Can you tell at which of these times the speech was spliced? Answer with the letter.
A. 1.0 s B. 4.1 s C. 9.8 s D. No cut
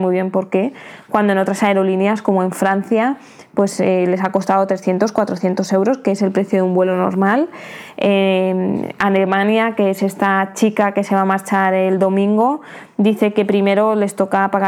D